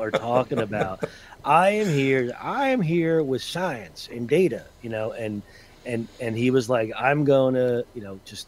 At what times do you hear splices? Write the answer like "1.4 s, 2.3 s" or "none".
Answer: none